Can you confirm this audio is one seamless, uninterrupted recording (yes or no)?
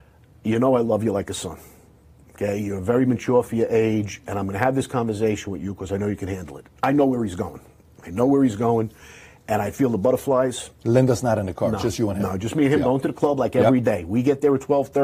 yes